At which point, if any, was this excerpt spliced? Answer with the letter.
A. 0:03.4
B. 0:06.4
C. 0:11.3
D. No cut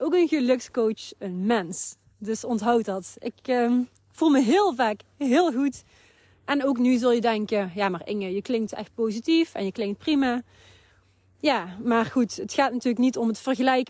D